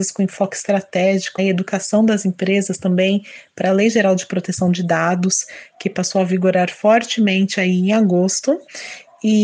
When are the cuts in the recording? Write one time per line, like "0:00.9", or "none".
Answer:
0:01.4